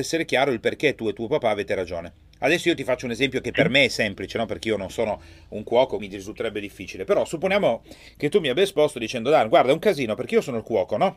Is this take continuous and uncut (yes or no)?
no